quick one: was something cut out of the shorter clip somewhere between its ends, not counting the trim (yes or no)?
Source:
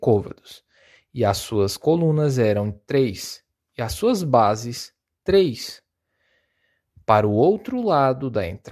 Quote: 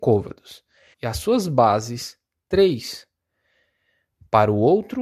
yes